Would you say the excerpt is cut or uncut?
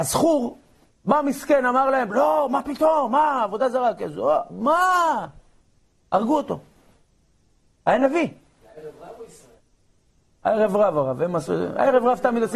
uncut